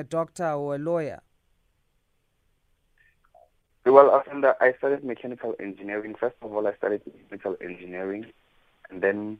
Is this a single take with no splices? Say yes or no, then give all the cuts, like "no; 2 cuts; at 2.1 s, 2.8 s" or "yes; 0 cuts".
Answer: yes; 0 cuts